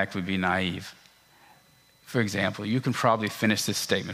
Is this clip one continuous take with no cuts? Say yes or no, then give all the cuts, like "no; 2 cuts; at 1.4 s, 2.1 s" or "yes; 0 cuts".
yes; 0 cuts